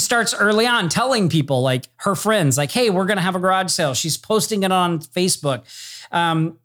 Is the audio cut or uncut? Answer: uncut